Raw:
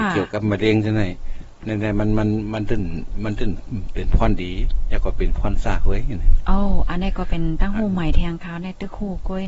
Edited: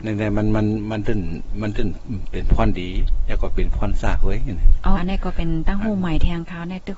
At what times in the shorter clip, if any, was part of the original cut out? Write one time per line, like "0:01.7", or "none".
0:05.0